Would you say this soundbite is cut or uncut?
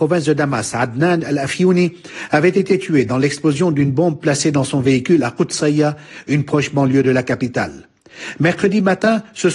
uncut